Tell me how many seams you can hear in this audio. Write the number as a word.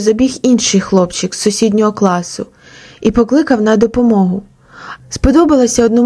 one